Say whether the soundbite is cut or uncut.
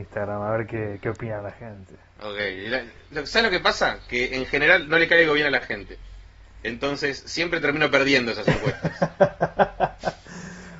uncut